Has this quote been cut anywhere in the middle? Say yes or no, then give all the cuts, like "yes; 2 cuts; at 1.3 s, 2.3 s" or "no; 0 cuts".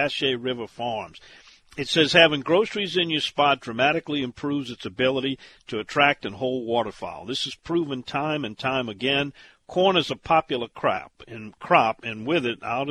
no; 0 cuts